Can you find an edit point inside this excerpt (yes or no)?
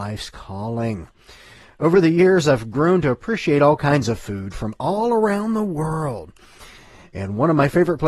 no